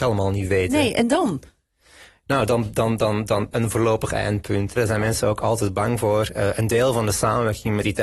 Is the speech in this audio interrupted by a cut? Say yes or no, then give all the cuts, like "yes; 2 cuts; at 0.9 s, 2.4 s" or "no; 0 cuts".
yes; 2 cuts; at 3.5 s, 4.8 s